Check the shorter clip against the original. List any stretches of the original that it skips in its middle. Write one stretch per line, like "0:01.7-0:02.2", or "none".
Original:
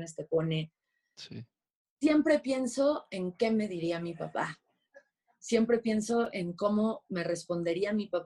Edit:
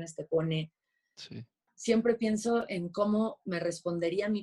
0:01.7-0:05.3